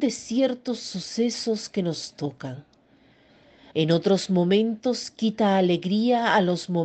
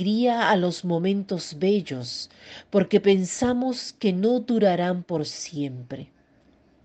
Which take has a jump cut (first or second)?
first